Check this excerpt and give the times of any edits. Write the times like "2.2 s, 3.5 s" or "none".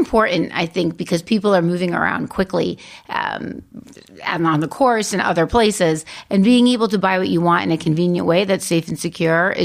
none